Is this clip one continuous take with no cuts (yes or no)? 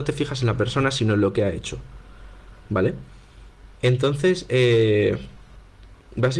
yes